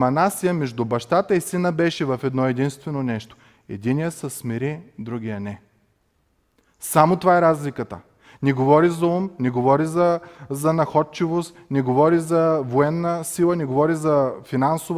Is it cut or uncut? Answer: uncut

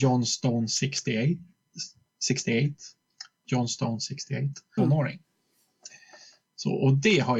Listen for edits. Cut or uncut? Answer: cut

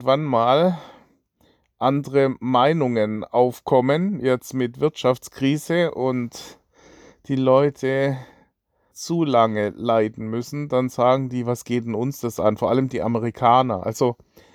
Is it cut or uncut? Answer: cut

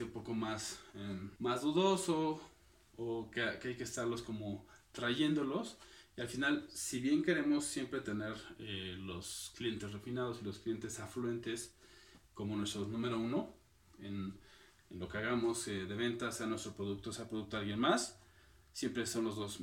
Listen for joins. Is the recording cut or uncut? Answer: uncut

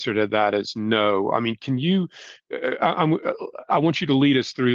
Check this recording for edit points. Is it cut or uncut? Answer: uncut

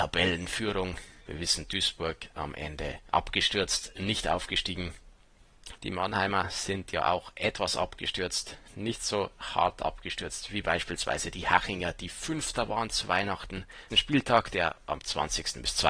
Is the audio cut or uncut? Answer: cut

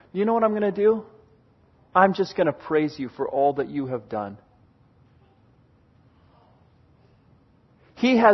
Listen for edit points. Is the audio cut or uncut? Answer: cut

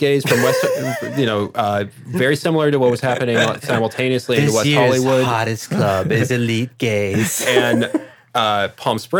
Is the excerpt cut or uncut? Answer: uncut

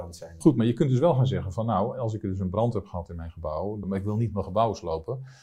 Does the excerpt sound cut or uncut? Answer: cut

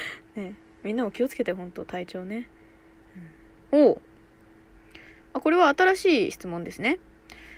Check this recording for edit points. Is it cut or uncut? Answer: cut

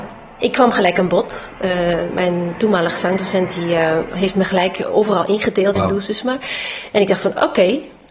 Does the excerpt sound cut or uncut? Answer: cut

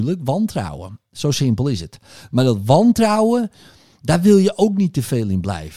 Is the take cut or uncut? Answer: uncut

